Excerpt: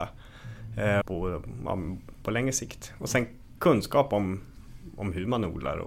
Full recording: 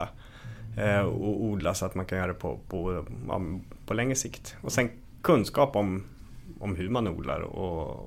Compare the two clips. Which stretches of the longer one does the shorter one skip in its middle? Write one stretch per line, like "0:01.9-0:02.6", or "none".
0:01.0-0:02.6